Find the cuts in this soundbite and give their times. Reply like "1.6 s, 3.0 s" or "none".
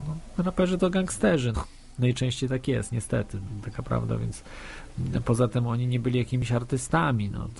1.5 s